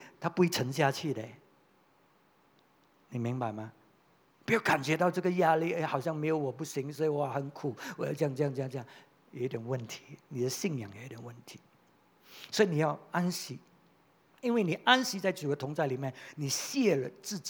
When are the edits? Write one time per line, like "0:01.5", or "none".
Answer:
0:14.3